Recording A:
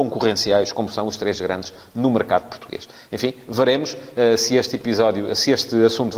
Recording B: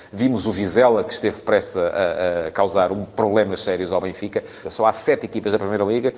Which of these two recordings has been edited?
B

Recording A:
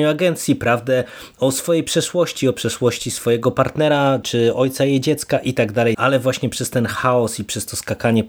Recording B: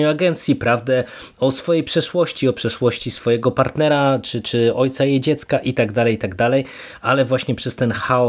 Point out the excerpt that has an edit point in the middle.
A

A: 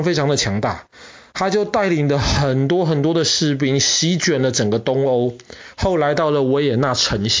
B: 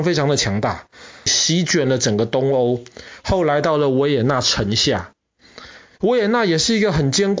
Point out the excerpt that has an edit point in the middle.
B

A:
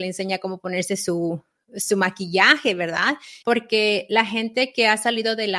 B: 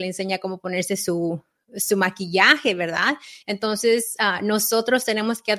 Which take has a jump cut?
A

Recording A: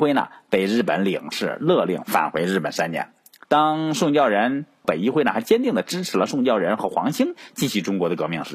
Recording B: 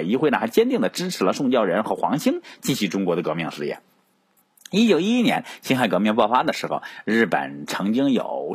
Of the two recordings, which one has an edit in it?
A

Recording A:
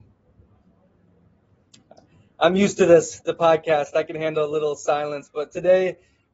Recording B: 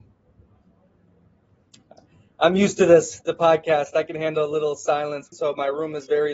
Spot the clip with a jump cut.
B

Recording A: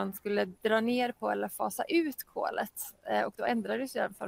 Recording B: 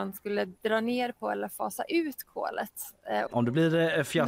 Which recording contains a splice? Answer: B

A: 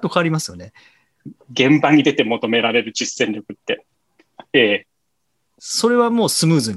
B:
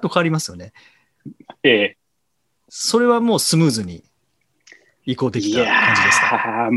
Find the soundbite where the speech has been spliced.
A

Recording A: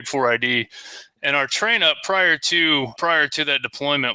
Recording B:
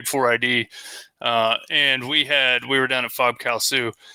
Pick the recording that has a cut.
A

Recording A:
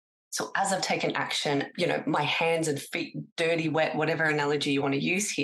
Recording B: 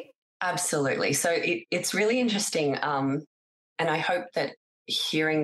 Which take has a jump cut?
A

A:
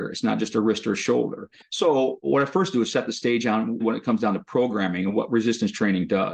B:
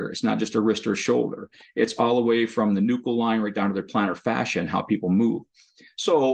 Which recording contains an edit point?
A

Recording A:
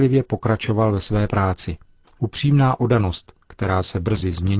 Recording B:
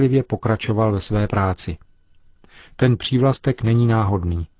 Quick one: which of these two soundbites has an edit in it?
A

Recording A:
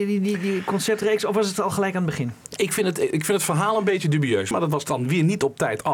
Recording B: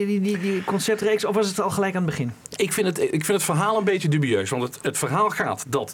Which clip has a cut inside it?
A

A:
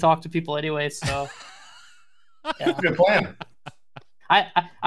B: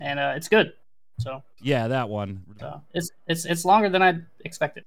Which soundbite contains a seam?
B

